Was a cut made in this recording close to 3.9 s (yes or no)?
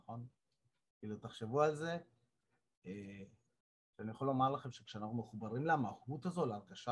yes